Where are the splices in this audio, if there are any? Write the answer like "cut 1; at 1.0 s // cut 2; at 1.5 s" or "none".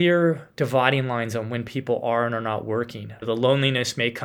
cut 1; at 3.2 s